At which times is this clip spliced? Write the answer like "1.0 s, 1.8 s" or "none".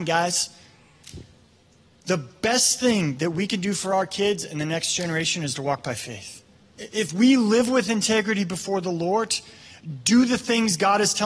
6.7 s